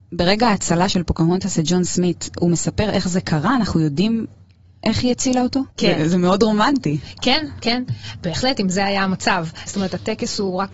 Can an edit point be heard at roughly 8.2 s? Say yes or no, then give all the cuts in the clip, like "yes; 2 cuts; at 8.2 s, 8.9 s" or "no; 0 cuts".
no; 2 cuts; at 5.8 s, 9.7 s